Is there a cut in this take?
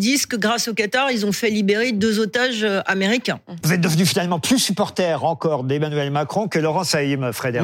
yes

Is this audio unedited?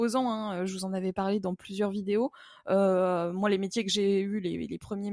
yes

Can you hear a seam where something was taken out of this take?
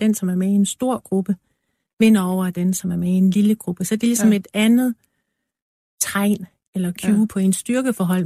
no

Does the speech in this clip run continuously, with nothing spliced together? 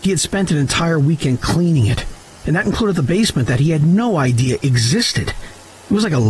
yes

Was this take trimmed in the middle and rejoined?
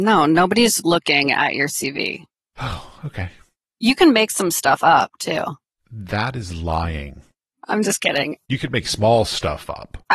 no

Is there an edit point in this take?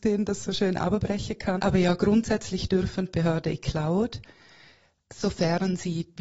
yes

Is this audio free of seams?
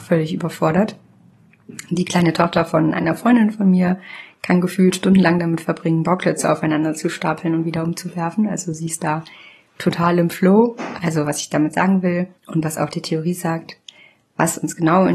no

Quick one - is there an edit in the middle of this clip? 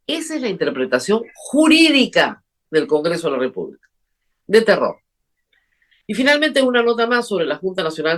no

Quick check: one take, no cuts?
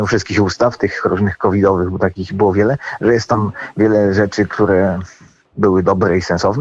yes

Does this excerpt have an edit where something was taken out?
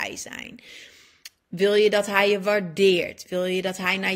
no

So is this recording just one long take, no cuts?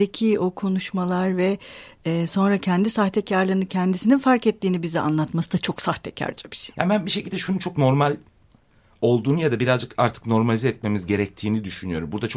no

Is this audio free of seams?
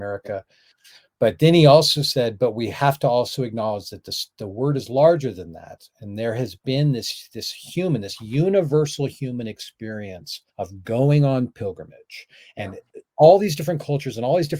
no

